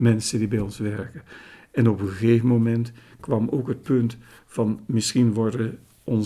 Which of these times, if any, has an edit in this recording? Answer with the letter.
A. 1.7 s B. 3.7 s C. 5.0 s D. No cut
D